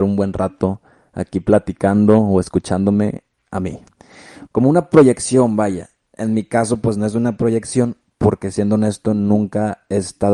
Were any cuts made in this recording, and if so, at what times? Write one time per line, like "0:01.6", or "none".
0:04.5